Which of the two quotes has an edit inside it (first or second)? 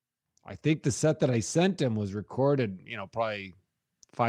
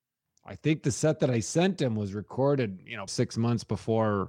second